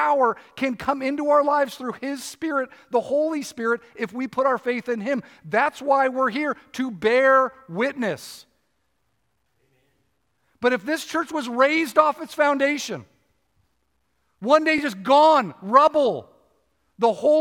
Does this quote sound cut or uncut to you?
uncut